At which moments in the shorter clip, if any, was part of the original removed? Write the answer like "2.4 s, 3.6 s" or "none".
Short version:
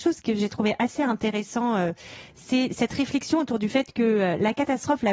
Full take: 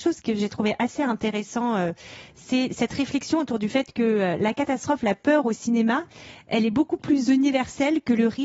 none